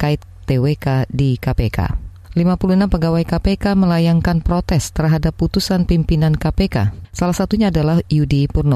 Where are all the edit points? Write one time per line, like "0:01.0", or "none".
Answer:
0:07.0